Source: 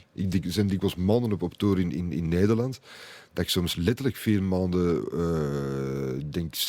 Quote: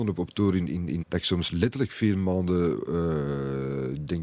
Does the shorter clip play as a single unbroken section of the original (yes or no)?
no